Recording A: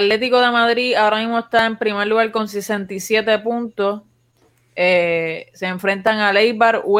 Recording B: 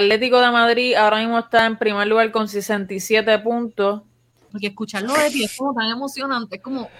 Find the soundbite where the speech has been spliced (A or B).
B